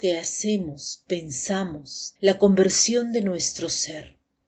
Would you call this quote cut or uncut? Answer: cut